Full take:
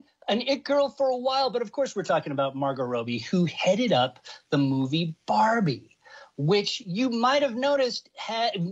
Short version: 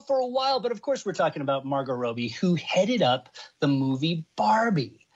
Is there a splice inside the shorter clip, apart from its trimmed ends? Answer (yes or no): no